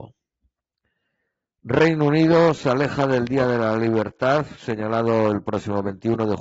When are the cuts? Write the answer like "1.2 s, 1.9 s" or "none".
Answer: none